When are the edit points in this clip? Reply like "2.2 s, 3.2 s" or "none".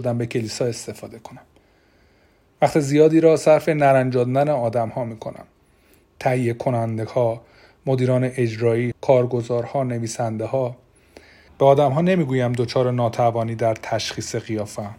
8.9 s, 11.5 s